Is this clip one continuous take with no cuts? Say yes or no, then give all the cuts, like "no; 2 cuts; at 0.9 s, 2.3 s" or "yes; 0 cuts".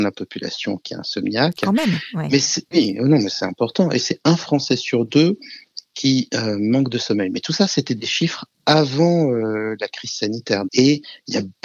no; 2 cuts; at 2.7 s, 10.7 s